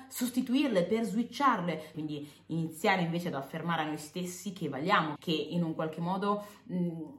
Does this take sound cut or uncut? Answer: cut